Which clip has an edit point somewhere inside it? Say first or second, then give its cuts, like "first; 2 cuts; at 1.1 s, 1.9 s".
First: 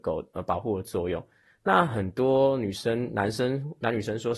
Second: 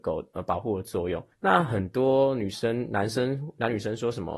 second; 1 cut; at 1.3 s